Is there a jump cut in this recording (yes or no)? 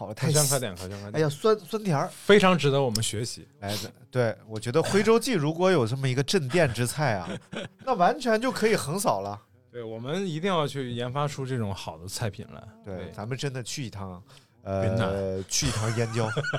no